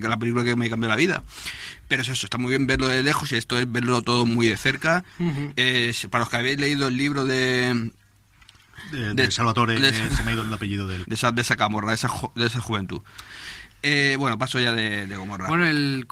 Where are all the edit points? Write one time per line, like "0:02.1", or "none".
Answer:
0:11.0

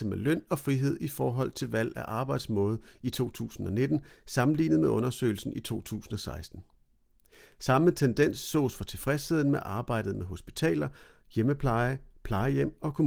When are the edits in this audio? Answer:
none

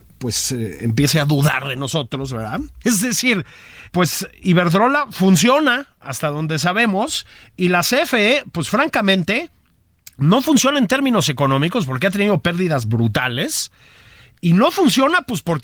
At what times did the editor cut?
0:02.8
0:03.9

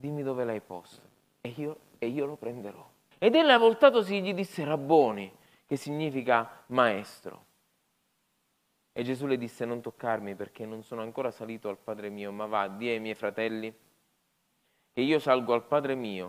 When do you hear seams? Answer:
0:03.1

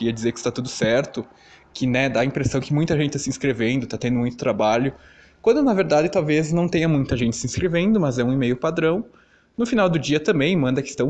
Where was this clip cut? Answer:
none

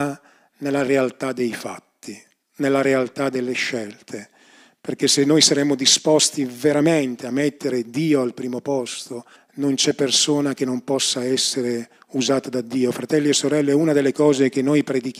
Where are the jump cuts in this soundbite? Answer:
0:09.4

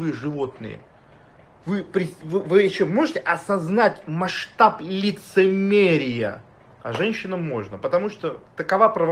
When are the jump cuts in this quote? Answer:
0:06.8

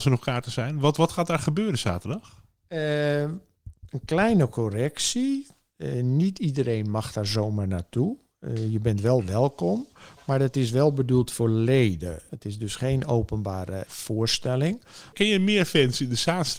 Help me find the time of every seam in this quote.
0:12.3
0:13.9
0:15.1

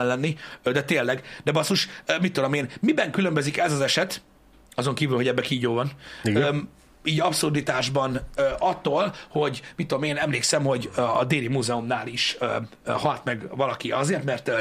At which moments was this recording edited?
none

